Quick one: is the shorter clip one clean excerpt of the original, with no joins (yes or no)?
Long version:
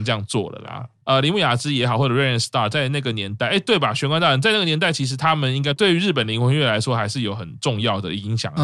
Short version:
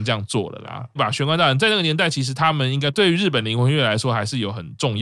no